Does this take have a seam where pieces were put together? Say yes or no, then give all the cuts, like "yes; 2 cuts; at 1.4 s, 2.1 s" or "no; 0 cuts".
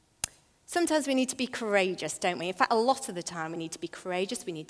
no; 0 cuts